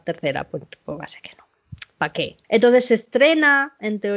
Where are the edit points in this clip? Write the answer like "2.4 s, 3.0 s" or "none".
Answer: none